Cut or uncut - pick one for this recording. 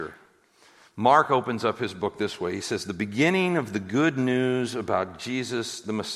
uncut